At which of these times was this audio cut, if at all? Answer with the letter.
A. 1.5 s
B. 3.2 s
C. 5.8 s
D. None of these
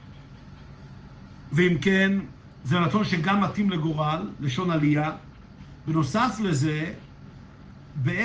D